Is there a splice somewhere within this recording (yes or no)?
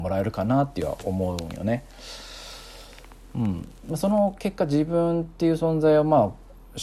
no